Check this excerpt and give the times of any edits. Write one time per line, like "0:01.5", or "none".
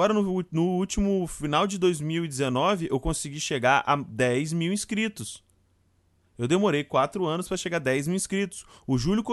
none